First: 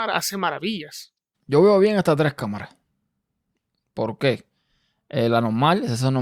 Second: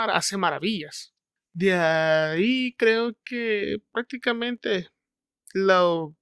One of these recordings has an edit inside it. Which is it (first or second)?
first